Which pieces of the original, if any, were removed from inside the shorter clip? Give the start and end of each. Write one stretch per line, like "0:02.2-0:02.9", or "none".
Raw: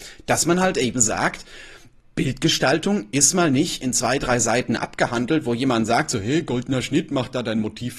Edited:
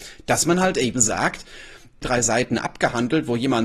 0:02.0-0:04.2